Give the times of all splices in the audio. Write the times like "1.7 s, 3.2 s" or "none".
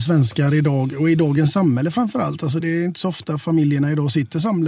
2.6 s